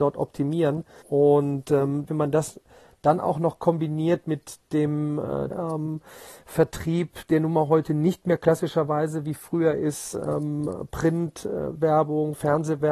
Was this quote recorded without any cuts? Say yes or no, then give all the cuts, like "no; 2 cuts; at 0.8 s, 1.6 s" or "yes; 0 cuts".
no; 3 cuts; at 1.0 s, 2.1 s, 5.5 s